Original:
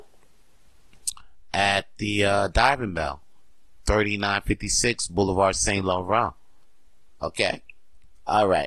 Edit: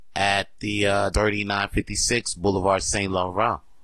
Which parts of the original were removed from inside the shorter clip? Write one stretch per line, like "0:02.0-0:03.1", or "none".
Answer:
0:02.5-0:03.8